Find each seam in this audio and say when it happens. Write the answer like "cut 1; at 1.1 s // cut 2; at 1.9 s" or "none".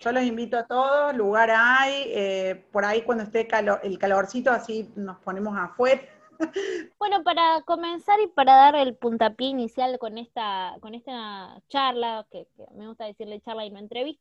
cut 1; at 6.9 s